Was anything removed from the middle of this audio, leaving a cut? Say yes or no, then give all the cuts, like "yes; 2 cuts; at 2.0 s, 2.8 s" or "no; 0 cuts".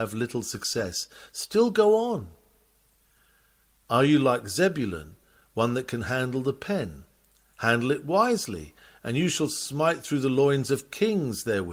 no; 0 cuts